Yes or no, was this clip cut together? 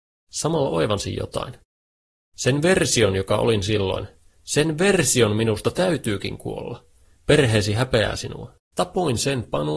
yes